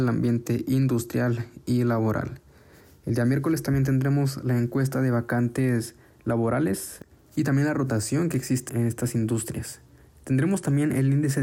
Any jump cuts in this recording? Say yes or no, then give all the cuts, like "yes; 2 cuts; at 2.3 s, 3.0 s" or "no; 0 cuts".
yes; 1 cut; at 8.7 s